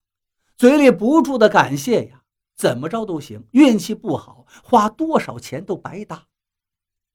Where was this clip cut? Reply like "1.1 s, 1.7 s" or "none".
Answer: 2.4 s